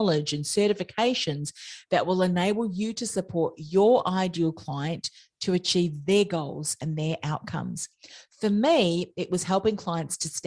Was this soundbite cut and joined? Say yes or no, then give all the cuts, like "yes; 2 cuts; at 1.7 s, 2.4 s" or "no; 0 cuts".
no; 0 cuts